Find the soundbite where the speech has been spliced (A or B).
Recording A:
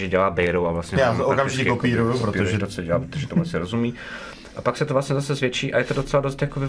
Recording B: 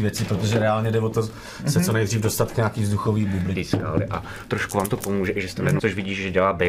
B